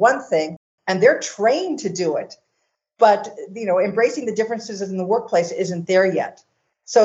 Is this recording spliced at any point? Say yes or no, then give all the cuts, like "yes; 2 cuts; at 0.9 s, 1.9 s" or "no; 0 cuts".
no; 0 cuts